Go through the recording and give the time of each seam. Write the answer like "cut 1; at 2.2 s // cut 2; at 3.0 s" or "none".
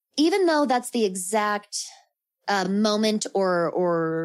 none